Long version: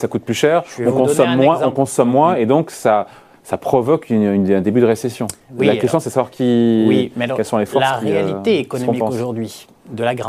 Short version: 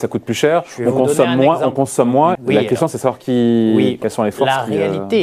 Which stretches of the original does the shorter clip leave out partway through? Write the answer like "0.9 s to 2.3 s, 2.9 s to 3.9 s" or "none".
2.4 s to 5.5 s, 7.1 s to 7.4 s